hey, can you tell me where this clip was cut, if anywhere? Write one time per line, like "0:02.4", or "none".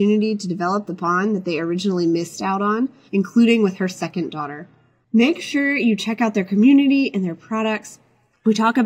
0:03.1